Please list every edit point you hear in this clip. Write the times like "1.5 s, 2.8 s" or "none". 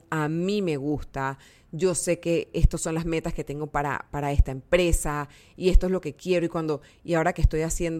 none